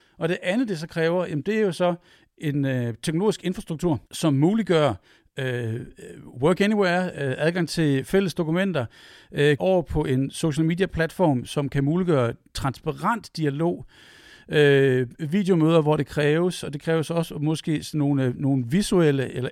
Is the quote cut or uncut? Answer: cut